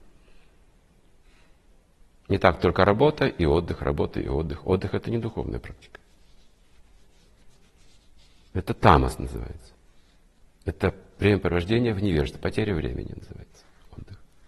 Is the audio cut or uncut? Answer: uncut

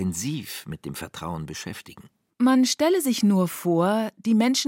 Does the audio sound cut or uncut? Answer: cut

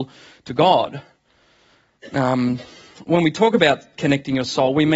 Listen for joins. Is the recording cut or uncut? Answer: uncut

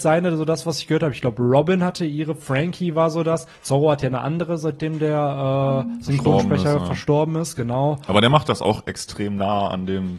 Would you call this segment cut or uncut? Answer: uncut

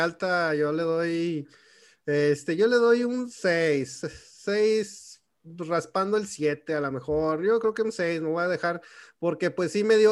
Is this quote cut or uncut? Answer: uncut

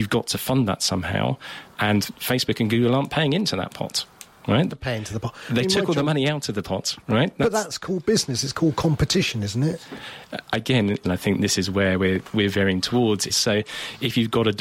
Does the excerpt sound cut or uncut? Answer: cut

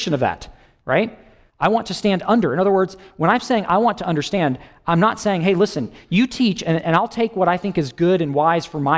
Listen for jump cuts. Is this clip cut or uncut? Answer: uncut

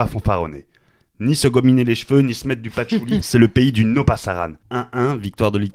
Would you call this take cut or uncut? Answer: cut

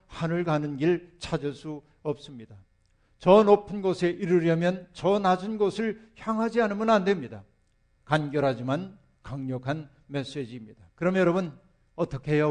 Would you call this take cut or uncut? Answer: cut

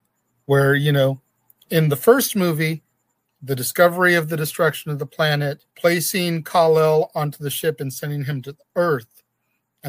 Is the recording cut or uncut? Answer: cut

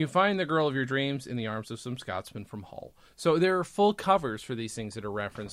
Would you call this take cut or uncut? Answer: uncut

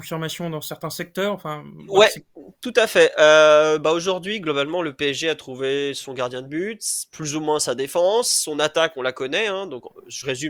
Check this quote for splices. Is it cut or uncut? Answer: uncut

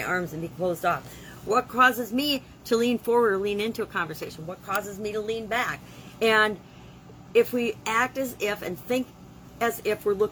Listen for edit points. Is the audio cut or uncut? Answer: uncut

